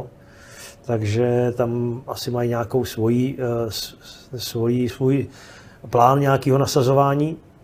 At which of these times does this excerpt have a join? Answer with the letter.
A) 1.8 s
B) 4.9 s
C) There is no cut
B